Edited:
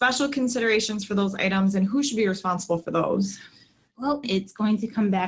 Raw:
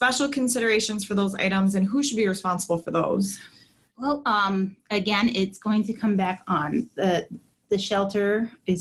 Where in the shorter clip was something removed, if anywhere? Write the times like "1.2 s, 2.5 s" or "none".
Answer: 4.2 s